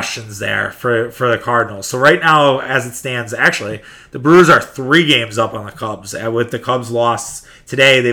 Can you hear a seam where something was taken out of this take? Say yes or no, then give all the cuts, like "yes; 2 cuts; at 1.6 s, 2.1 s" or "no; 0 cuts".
no; 0 cuts